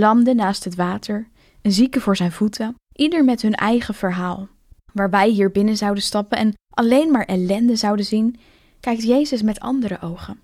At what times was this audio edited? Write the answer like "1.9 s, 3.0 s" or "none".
4.7 s